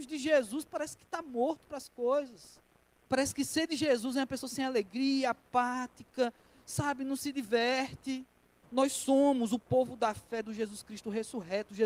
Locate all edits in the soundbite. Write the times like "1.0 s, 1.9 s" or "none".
3.0 s, 8.6 s